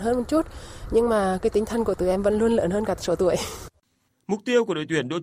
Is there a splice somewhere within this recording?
no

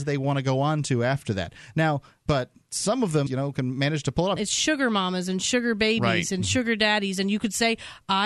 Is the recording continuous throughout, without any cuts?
no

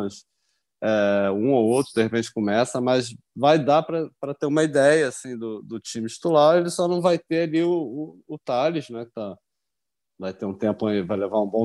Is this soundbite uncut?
yes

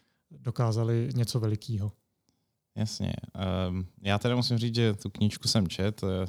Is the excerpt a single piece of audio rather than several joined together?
yes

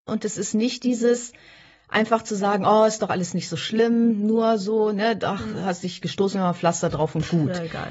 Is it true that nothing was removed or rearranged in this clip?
yes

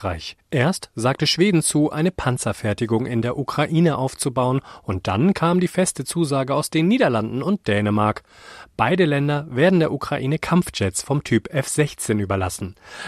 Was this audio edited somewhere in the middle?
no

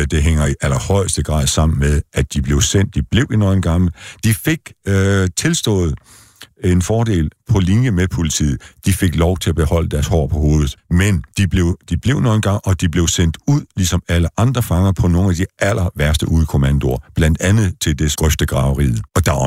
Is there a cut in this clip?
yes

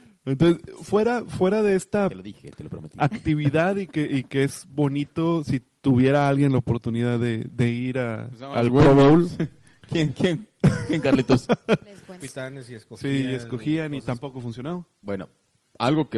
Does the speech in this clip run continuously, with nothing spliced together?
no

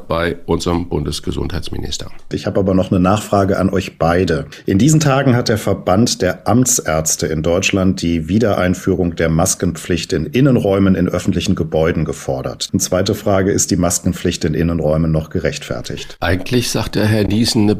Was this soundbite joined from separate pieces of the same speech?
yes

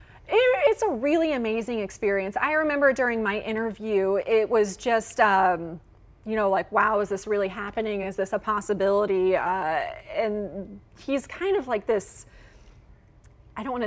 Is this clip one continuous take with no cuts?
yes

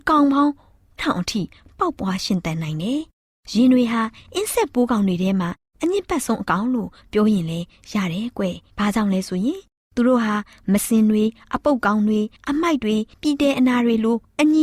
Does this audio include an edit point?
yes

